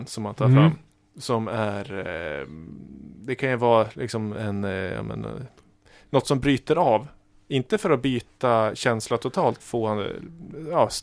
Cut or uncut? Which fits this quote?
cut